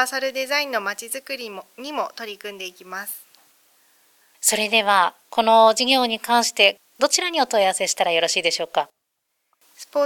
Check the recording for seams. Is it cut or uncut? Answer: uncut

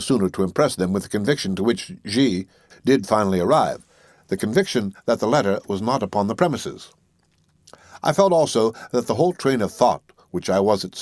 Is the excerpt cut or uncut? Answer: cut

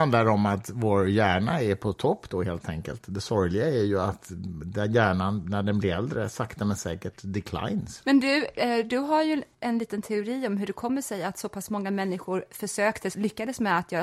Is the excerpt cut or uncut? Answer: cut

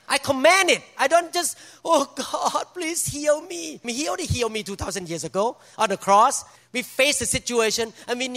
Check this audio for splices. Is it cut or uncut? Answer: cut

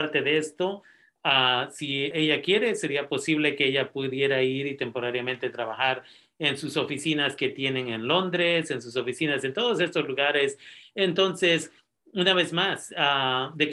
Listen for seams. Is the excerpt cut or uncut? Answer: cut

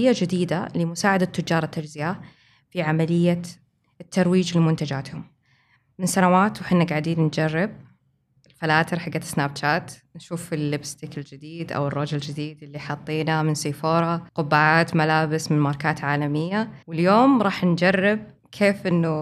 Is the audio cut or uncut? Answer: cut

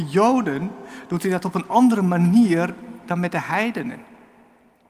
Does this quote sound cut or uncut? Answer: uncut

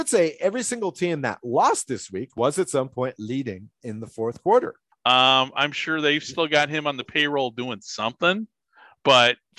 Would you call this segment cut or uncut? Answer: cut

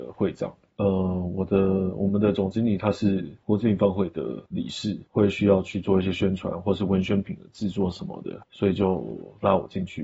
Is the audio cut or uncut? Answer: cut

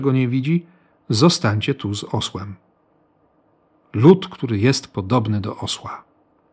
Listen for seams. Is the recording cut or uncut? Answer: uncut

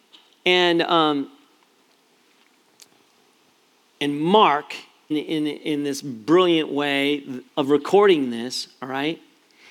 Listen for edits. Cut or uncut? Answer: cut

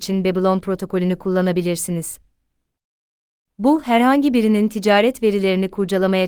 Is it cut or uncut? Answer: uncut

